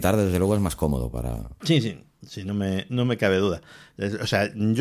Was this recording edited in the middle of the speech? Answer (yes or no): no